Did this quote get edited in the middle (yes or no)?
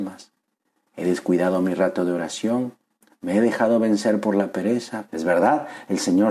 yes